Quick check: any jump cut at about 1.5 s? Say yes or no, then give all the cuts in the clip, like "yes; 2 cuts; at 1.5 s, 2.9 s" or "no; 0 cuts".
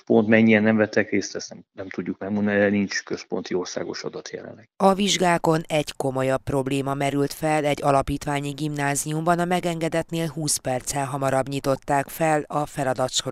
no; 0 cuts